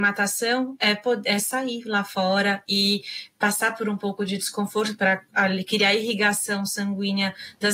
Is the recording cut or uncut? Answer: uncut